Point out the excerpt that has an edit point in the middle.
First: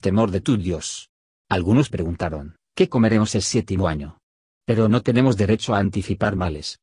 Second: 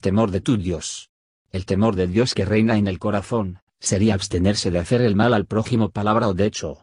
first; 2 cuts; at 1.3 s, 4.5 s

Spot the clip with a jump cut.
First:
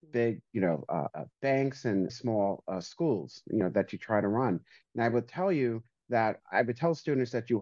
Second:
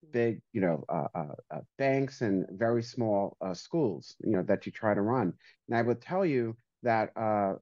first; 3 cuts; at 1.1 s, 2.1 s, 6.4 s

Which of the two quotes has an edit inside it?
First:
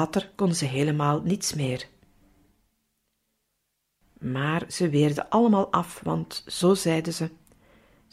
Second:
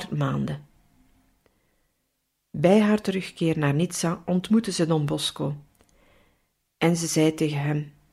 first; 1 cut; at 4.0 s

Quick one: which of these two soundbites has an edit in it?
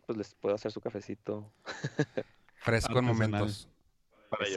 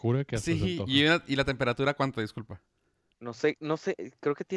second; 1 cut; at 3.1 s

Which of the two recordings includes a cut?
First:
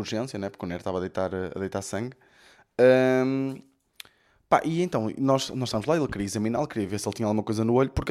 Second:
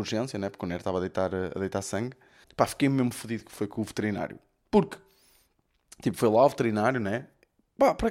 second; 1 cut; at 2.4 s

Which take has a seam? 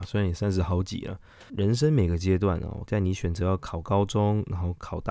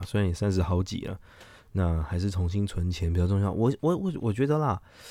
first; 2 cuts; at 1.5 s, 2.9 s

